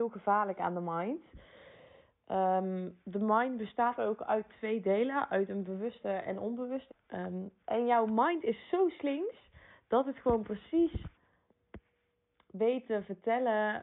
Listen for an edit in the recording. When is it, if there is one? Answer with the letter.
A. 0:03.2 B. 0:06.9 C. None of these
B